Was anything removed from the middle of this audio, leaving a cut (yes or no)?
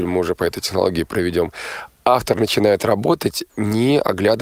yes